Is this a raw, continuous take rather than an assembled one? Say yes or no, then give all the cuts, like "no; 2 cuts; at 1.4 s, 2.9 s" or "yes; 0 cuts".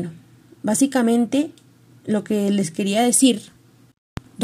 yes; 0 cuts